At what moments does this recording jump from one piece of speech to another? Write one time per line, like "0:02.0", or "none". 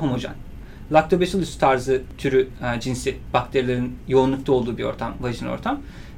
none

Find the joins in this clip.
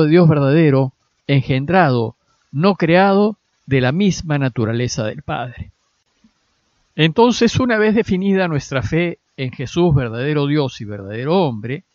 none

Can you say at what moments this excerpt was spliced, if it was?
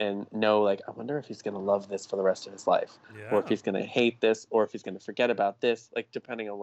none

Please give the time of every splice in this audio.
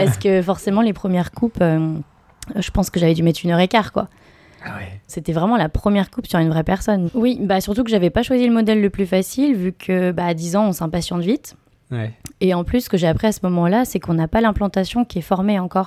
0:05.1
0:07.1

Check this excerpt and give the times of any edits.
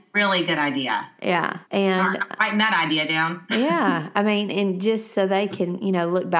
0:01.6

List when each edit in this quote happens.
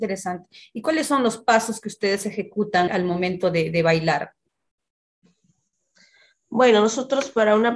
0:02.9

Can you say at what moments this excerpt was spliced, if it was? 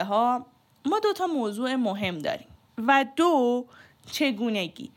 0:02.7

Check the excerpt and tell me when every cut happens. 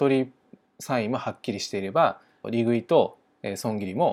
0:02.4

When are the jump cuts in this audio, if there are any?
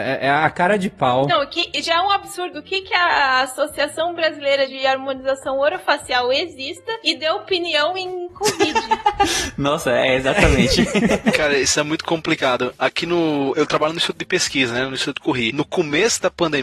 none

